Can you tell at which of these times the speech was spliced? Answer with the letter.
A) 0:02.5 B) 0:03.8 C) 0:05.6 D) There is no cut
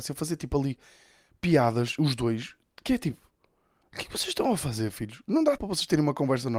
C